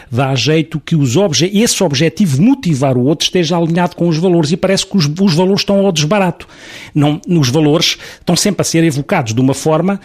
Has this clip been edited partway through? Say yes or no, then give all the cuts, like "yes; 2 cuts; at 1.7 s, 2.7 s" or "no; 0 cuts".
no; 0 cuts